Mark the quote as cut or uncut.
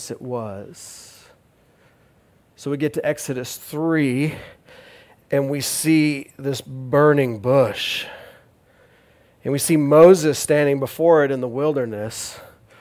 uncut